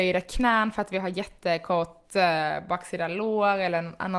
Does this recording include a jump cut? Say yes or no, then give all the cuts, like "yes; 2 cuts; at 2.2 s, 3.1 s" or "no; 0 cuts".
no; 0 cuts